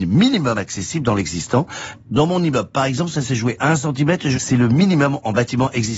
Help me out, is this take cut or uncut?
cut